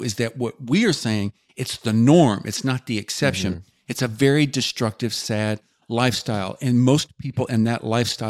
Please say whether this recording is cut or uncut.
uncut